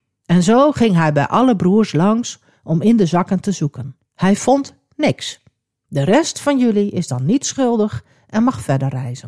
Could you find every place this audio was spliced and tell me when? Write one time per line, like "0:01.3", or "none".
0:04.0
0:05.8